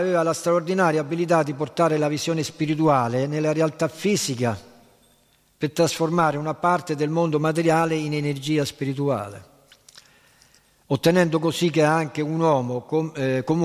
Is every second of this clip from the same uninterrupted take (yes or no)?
yes